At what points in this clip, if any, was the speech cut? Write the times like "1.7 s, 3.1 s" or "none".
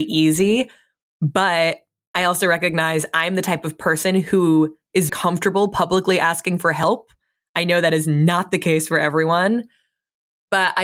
5.1 s